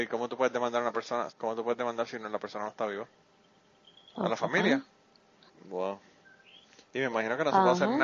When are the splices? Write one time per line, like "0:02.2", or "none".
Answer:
0:01.3
0:05.5